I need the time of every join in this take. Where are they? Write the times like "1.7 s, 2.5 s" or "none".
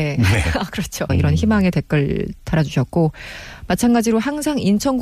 1.1 s